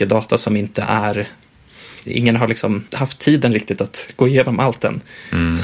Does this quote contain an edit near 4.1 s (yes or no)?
no